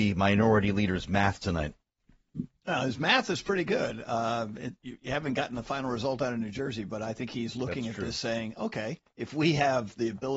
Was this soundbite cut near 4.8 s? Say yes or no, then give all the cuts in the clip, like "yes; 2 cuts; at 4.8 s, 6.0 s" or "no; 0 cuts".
yes; 1 cut; at 4.8 s